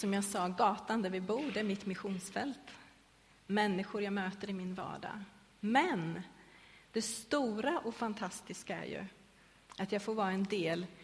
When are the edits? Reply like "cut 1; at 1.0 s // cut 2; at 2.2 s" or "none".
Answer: none

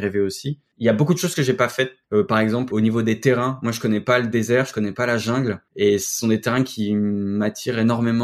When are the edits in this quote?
cut 1; at 2.7 s

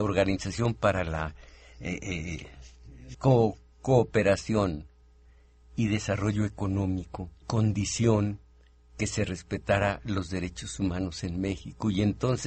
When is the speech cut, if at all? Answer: cut 1; at 3.1 s // cut 2; at 7.4 s

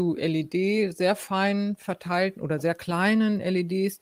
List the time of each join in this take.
none

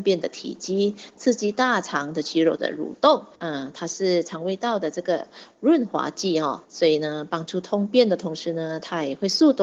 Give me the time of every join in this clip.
cut 1; at 3.3 s // cut 2; at 6.6 s

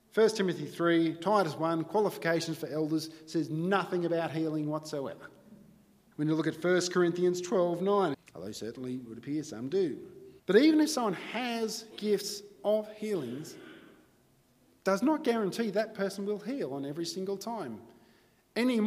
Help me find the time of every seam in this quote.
cut 1; at 6.1 s // cut 2; at 8.1 s // cut 3; at 10.4 s

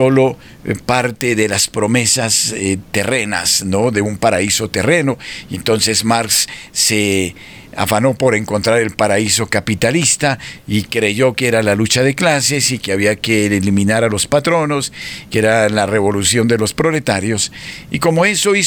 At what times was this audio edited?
none

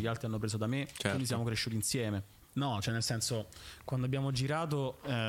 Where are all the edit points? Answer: cut 1; at 2.5 s

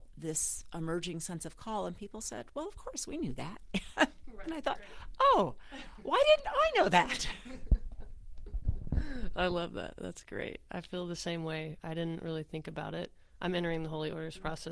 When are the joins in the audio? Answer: none

